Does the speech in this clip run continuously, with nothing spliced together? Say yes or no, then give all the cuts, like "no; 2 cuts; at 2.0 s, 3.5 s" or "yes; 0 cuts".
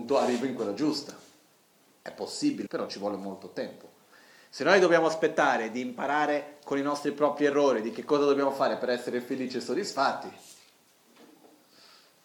no; 1 cut; at 2.7 s